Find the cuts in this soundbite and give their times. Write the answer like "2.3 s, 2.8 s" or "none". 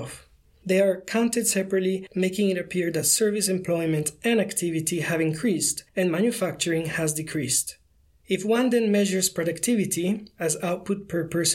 none